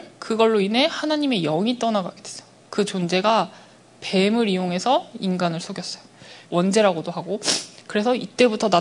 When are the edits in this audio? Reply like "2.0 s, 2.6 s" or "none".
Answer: 2.6 s, 6.4 s